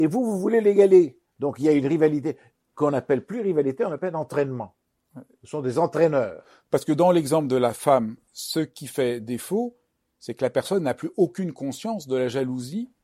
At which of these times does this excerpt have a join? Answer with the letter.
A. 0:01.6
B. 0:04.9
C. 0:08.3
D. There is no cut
C